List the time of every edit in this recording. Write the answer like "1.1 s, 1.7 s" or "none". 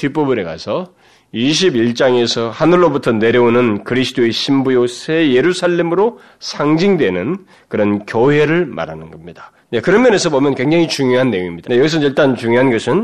9.7 s, 11.6 s